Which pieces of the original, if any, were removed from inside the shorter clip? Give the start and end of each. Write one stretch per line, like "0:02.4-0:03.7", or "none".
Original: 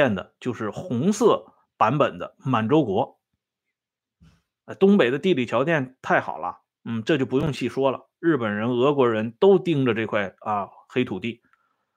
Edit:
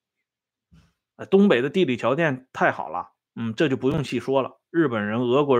none